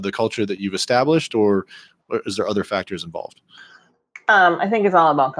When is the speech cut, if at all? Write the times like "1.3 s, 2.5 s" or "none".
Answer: none